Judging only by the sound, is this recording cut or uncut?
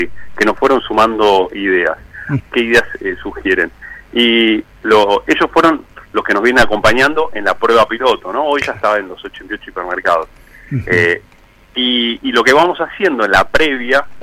cut